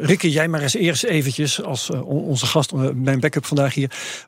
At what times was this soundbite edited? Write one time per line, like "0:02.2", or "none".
none